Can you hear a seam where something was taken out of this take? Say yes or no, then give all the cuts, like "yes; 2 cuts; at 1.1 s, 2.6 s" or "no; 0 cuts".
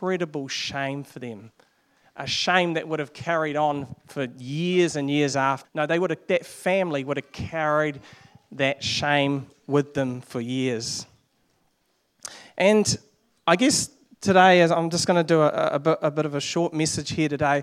yes; 1 cut; at 5.6 s